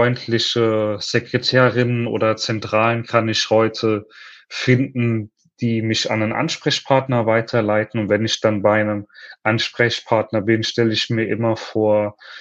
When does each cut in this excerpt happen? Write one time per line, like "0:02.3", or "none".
none